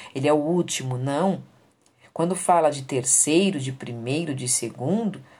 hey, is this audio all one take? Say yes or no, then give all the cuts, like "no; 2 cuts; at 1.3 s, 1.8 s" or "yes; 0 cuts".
yes; 0 cuts